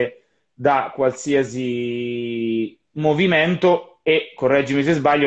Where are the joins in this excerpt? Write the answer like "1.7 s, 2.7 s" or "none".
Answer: none